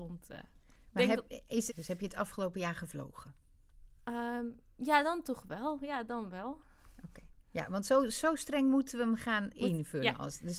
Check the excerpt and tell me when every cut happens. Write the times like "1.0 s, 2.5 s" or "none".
1.7 s, 7.4 s